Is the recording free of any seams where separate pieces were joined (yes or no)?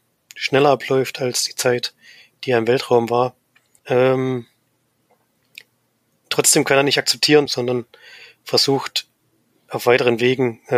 no